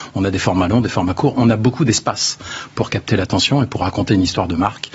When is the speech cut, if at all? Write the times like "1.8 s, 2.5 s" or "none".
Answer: none